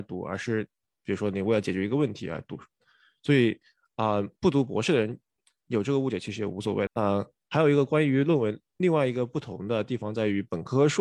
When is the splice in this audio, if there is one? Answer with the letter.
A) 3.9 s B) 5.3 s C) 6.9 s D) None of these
C